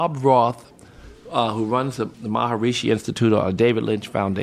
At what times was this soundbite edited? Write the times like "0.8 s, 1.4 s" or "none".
2.1 s